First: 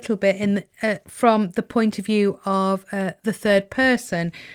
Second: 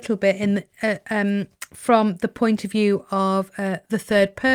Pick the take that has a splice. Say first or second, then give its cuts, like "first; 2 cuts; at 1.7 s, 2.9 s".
first; 1 cut; at 1.0 s